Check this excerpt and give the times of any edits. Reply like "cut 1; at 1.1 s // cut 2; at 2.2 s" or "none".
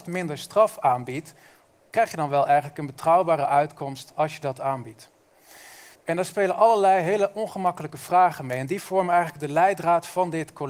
cut 1; at 5.9 s